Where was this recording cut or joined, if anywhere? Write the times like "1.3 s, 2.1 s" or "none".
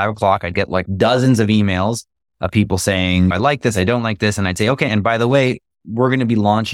4.9 s